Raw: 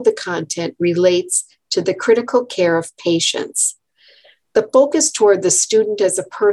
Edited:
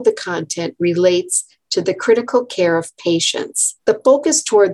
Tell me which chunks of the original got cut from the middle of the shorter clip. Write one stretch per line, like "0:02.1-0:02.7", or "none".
0:03.8-0:04.5